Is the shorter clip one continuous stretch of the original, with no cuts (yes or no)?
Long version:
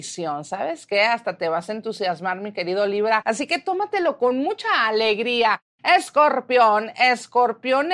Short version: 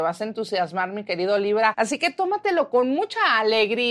yes